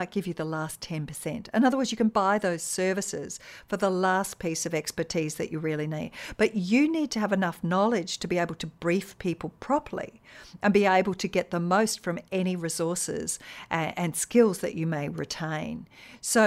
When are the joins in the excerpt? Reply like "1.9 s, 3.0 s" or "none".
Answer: none